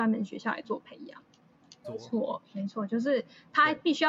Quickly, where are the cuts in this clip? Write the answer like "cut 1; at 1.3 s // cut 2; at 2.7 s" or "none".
cut 1; at 1.8 s